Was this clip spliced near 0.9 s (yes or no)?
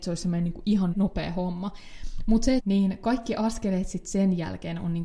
yes